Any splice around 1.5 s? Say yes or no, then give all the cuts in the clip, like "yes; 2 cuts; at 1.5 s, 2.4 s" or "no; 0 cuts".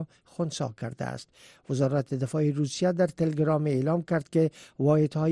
no; 0 cuts